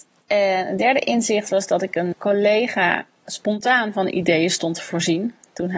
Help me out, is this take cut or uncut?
cut